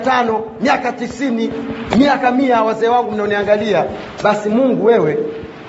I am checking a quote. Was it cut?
no; 0 cuts

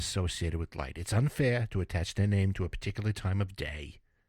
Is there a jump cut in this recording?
no; 0 cuts

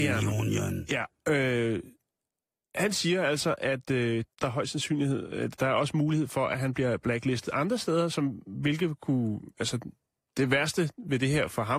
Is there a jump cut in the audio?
yes; 1 cut; at 4.3 s

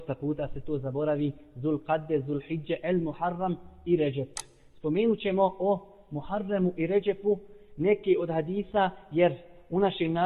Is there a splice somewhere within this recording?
no; 0 cuts

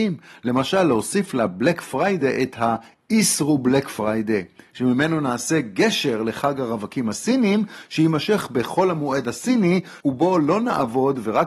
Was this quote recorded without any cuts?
no; 1 cut; at 10.0 s

